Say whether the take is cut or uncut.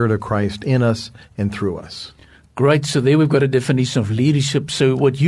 uncut